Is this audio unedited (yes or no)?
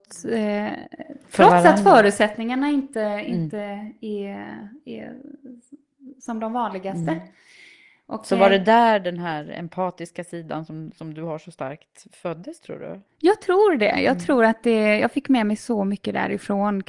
yes